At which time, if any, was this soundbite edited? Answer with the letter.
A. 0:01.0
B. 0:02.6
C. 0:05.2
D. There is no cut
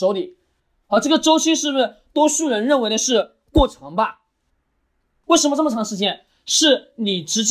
C